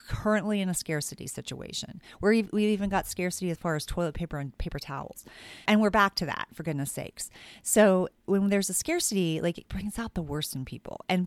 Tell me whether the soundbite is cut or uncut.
cut